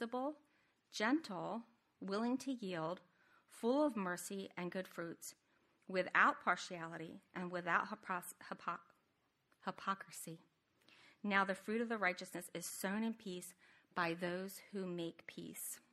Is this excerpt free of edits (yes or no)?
yes